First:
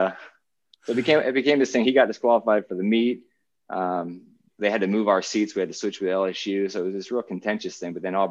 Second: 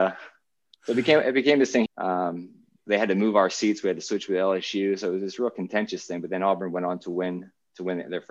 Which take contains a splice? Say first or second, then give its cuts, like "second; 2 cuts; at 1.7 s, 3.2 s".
second; 1 cut; at 1.9 s